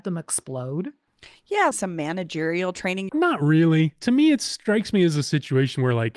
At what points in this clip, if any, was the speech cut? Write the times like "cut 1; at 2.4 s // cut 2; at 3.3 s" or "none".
cut 1; at 1.7 s // cut 2; at 3.1 s